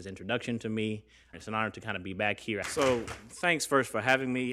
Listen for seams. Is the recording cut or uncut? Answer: cut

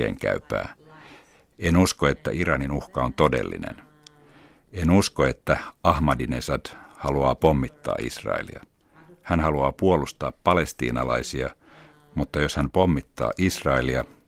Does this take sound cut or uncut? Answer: uncut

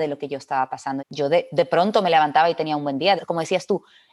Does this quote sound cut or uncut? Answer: cut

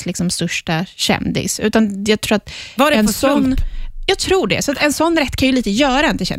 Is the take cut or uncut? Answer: uncut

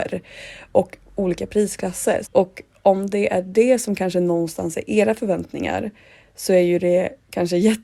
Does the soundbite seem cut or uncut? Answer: cut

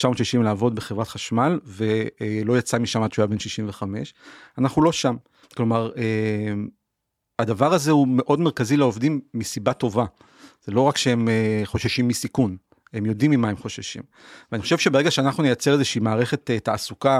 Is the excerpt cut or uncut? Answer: cut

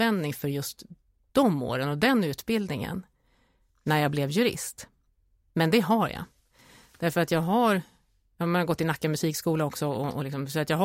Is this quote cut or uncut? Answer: uncut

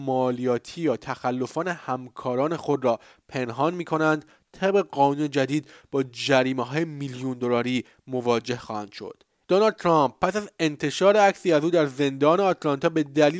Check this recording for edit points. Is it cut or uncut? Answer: cut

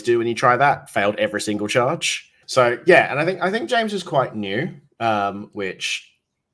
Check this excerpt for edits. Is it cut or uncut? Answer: cut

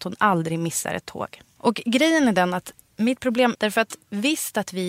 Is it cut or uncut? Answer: cut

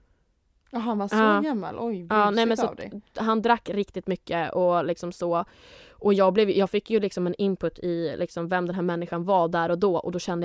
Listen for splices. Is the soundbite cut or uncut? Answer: uncut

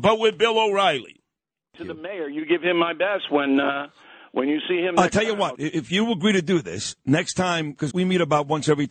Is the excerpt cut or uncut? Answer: cut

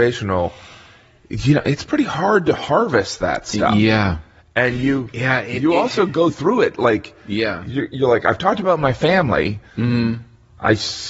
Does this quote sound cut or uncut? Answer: uncut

